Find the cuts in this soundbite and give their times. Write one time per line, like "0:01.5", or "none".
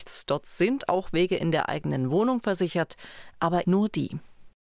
0:03.6